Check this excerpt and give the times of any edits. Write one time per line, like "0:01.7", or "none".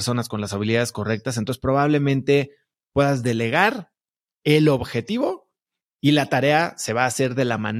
none